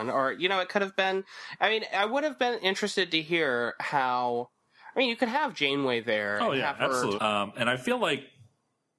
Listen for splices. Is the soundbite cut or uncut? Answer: cut